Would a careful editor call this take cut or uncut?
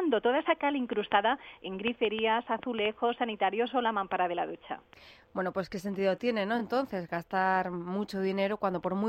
uncut